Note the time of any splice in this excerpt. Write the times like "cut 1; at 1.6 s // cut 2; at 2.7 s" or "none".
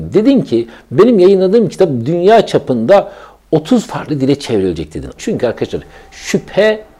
cut 1; at 5.2 s